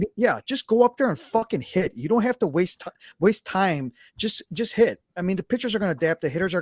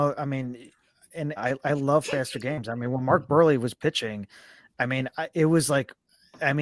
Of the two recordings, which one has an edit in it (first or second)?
second